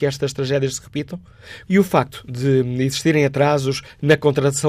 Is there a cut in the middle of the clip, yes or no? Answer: yes